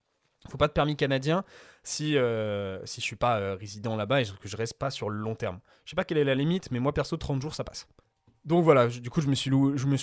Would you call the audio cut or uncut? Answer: uncut